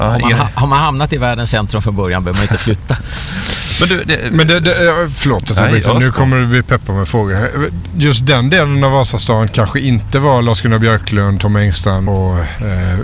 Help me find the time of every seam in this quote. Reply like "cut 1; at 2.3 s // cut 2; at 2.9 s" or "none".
cut 1; at 12.1 s

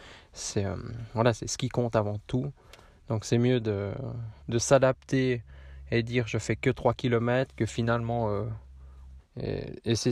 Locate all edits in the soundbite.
cut 1; at 4.4 s // cut 2; at 9.2 s

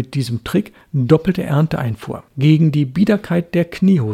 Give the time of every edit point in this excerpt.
cut 1; at 2.3 s

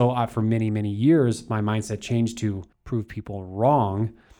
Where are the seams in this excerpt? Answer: cut 1; at 2.7 s

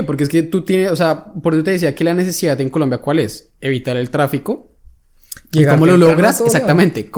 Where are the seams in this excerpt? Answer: none

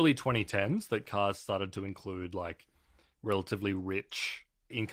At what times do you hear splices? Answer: none

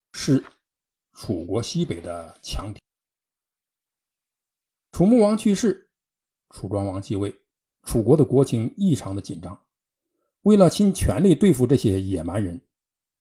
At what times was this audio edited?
cut 1; at 7.7 s

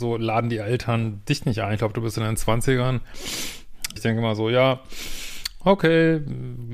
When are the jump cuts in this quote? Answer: cut 1; at 4.0 s

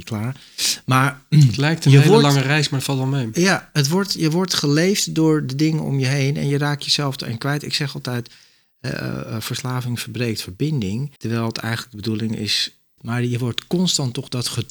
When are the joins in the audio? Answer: cut 1; at 11.2 s // cut 2; at 13.0 s

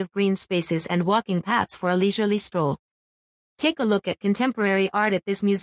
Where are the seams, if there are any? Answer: cut 1; at 3.5 s

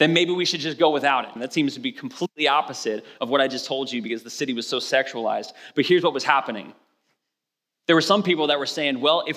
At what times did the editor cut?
cut 1; at 1.4 s

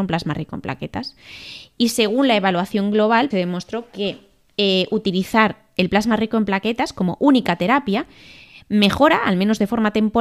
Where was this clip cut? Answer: cut 1; at 3.3 s

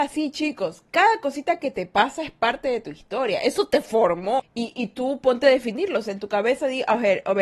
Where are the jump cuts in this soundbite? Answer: cut 1; at 4.4 s

